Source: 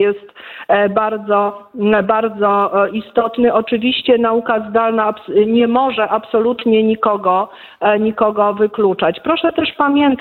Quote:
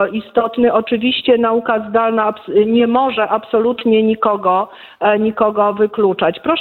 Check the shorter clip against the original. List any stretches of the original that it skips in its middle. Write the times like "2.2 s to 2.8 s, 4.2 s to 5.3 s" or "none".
none